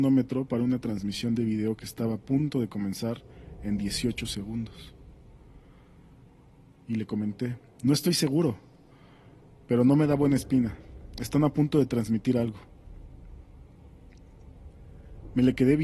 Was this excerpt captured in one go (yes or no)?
yes